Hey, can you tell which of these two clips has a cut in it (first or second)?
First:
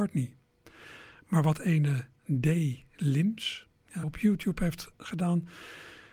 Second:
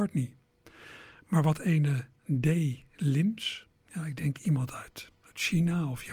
first